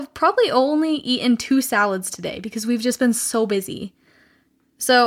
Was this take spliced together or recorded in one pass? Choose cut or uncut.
uncut